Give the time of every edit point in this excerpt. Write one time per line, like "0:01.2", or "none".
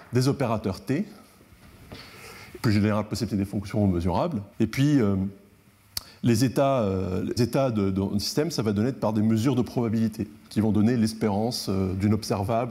0:02.6
0:04.5
0:07.4